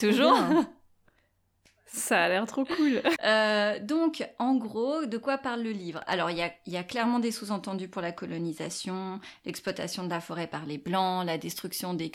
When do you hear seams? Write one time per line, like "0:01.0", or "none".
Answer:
0:03.1
0:06.1

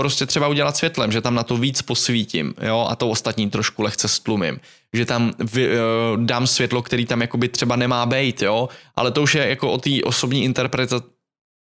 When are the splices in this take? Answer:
none

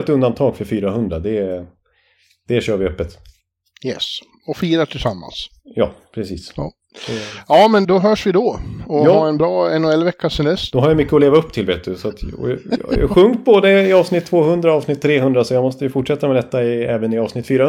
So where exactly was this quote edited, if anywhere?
0:07.8
0:10.7

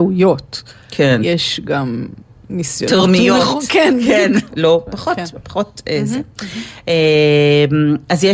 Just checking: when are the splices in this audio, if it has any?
0:04.5

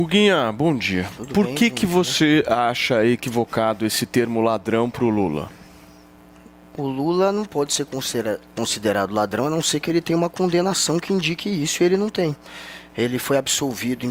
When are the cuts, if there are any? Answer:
none

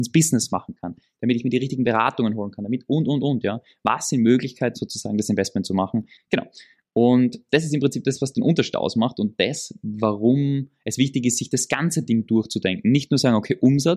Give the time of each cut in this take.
0:04.7
0:06.2

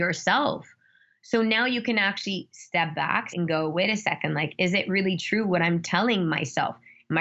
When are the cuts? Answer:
0:03.3

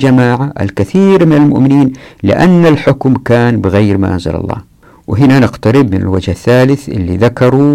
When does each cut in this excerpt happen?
none

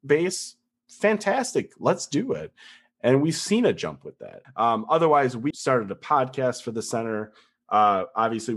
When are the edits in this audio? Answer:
0:04.4
0:05.5

